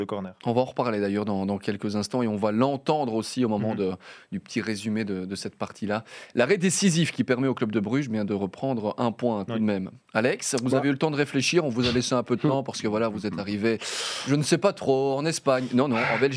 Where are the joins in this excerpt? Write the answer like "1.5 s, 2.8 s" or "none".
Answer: none